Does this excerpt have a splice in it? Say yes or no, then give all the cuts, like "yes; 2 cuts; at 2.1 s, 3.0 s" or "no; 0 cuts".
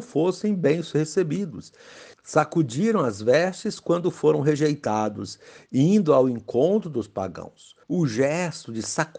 yes; 2 cuts; at 2.1 s, 7.8 s